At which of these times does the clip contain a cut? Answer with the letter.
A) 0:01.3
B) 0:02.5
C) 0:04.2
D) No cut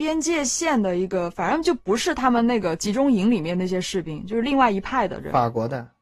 D